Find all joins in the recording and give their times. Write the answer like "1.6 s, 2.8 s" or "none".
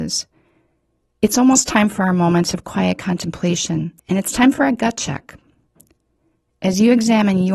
1.1 s, 4.0 s